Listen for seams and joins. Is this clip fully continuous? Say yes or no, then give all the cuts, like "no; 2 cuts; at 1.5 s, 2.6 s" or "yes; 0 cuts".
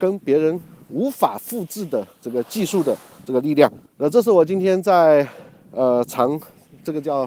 no; 1 cut; at 3.9 s